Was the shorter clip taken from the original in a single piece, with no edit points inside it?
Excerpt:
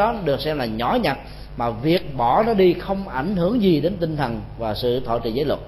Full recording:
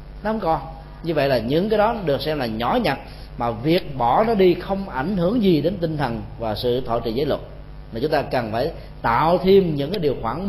yes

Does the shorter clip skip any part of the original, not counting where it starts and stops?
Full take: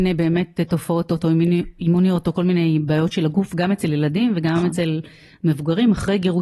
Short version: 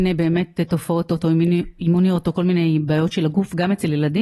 no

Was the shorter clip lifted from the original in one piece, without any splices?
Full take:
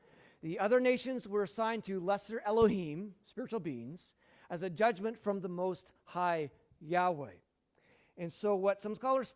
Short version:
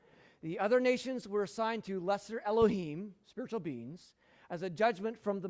yes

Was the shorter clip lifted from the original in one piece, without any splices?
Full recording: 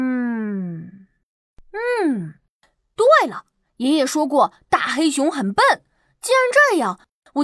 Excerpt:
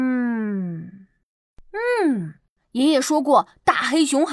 no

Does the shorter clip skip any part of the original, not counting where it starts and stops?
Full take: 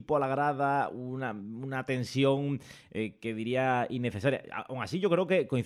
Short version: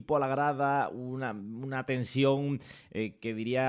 no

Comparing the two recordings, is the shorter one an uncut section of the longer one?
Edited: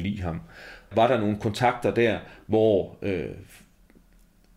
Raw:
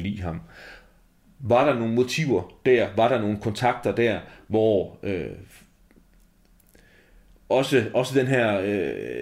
no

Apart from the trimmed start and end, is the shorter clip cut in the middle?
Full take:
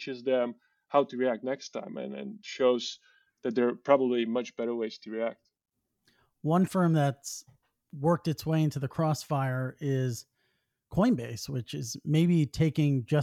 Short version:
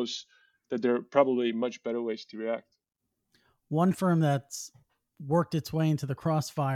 no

